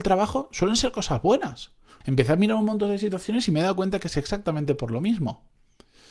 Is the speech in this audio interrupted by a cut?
yes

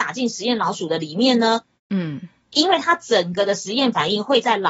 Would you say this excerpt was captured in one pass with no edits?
no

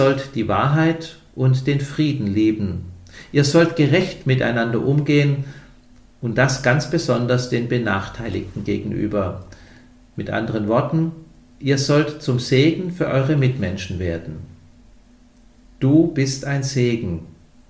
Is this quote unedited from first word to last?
yes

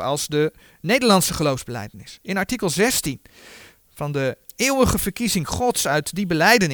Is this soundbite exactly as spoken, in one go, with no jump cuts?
yes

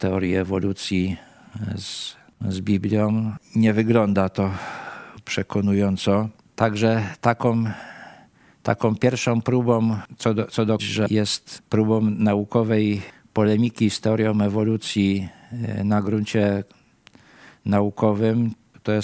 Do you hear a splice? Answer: yes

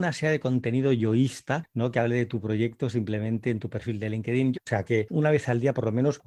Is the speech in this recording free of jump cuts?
no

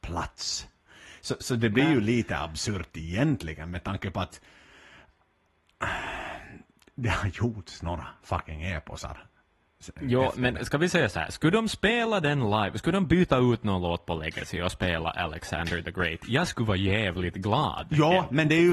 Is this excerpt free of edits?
yes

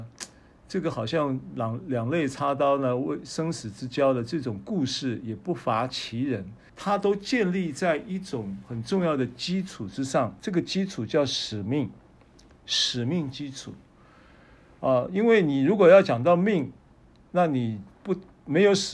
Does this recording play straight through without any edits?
no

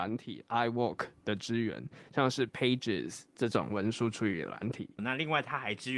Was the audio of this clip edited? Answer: yes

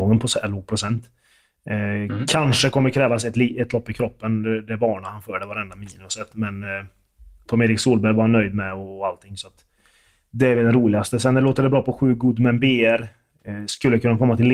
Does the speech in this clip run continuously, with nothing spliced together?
yes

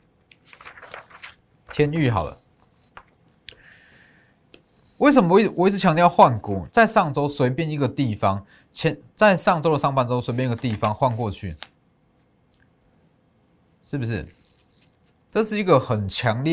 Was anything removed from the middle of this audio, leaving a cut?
yes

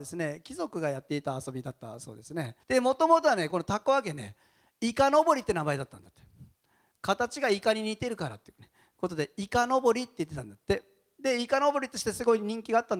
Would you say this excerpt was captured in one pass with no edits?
no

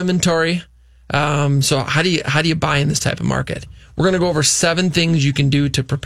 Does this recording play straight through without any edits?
yes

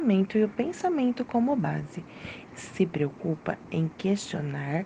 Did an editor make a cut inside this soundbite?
yes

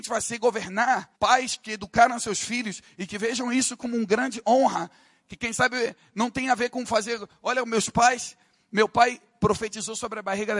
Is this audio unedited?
no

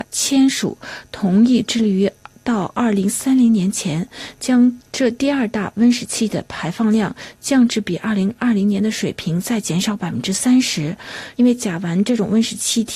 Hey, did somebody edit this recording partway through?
yes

